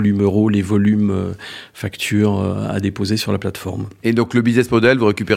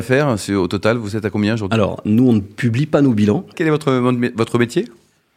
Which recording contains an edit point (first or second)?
second